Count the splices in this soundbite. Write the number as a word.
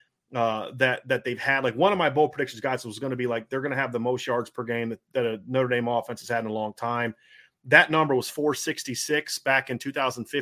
zero